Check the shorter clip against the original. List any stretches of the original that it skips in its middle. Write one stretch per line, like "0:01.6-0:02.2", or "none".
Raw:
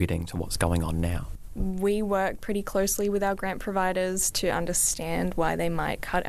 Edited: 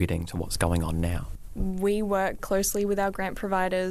0:02.4-0:02.6

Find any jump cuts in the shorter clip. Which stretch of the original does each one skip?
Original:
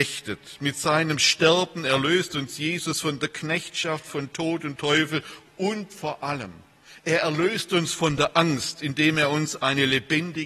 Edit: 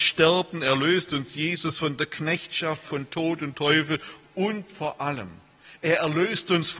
none

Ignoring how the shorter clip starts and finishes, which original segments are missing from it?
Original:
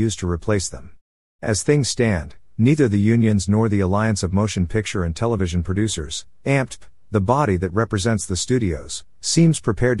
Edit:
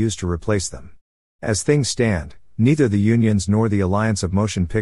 none

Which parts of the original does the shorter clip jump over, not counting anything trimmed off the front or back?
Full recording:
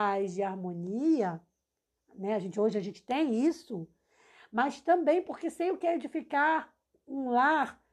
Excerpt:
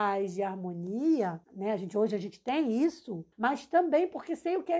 0:01.4-0:02.1
0:03.9-0:04.5

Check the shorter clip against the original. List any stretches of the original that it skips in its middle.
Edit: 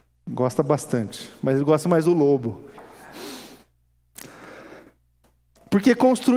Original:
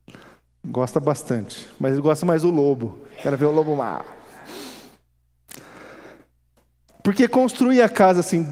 0:03.1-0:04.1

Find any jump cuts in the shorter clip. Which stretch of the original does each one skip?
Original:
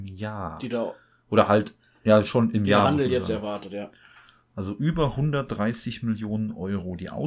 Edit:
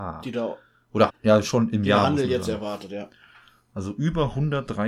0:01.5-0:01.9

